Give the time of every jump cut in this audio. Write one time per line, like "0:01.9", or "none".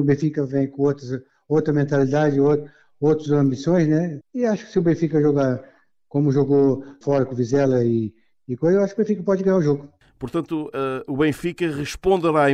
0:04.2